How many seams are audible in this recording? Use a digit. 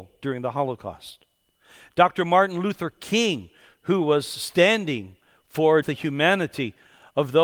1